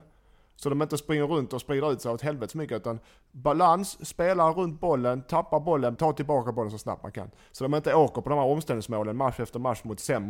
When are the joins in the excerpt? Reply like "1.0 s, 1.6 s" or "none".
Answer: 6.0 s

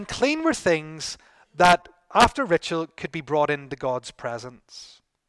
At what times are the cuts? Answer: none

